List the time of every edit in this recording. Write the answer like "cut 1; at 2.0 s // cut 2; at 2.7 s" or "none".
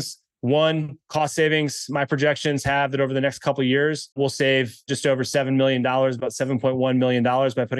cut 1; at 4.1 s